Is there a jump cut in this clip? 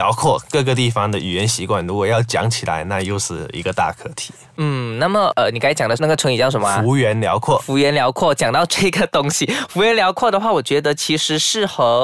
no; 0 cuts

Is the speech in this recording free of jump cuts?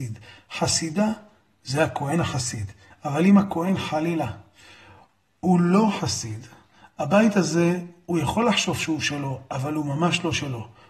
no; 1 cut; at 2.9 s

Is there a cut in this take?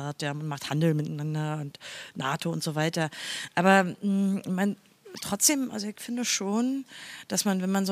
no; 0 cuts

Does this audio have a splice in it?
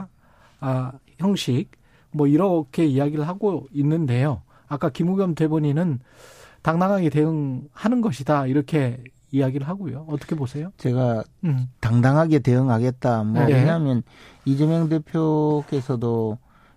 yes; 2 cuts; at 11.7 s, 13.5 s

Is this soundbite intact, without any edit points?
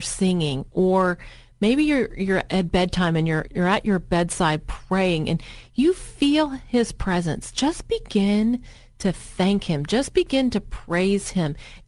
no; 1 cut; at 3.5 s

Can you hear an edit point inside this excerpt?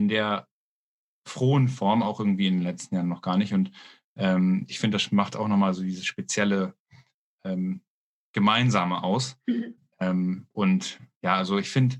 no; 0 cuts

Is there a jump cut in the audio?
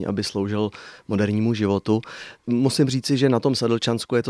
yes; 1 cut; at 2.4 s

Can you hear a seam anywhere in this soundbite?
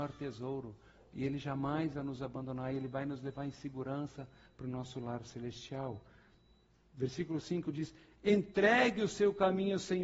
no; 0 cuts

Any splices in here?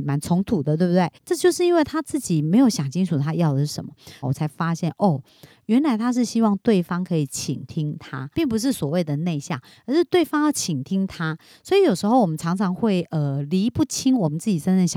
yes; 3 cuts; at 1.1 s, 4.2 s, 8.3 s

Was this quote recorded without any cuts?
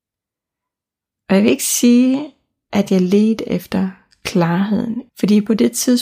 no; 2 cuts; at 1.1 s, 5.1 s

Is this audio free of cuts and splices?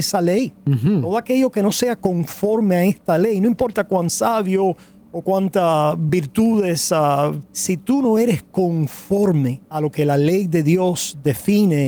no; 2 cuts; at 7.4 s, 9.7 s

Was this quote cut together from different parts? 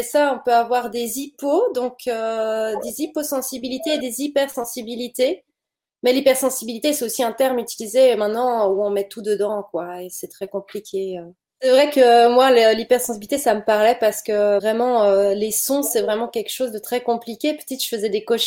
no; 0 cuts

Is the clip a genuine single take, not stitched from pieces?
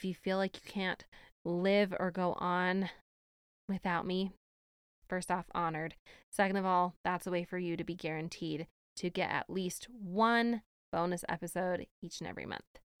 yes; 0 cuts

